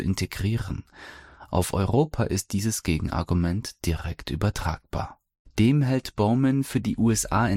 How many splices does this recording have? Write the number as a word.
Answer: two